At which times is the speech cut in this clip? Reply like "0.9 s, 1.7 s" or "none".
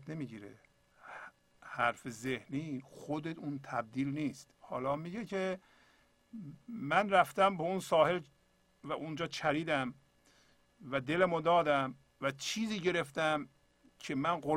4.5 s